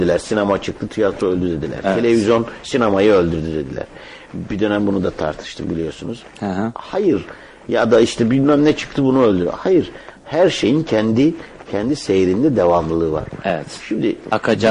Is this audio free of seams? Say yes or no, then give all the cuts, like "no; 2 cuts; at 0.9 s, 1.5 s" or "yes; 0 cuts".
yes; 0 cuts